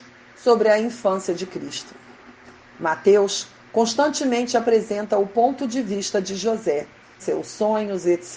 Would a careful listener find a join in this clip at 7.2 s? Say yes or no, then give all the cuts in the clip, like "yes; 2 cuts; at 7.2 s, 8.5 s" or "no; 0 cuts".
yes; 1 cut; at 7.2 s